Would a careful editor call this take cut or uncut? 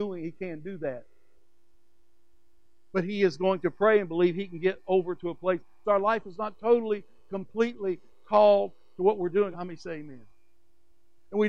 cut